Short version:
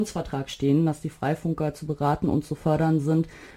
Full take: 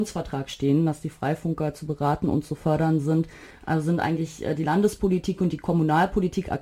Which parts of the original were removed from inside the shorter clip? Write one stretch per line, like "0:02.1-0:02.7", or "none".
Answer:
none